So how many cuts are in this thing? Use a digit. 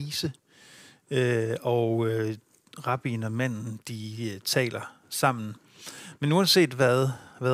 0